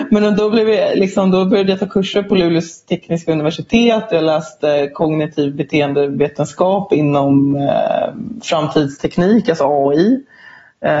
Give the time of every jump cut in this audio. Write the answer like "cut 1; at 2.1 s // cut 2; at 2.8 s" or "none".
none